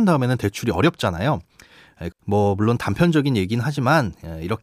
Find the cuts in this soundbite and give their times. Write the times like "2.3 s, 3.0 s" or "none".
2.1 s